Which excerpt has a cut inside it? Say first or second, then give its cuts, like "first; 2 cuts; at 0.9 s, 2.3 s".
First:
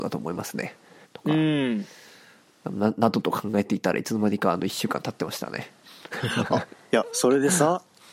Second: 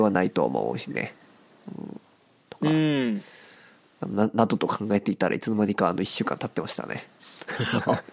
first; 1 cut; at 1.0 s